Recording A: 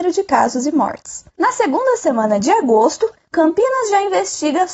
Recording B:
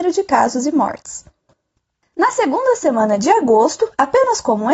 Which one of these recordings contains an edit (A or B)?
A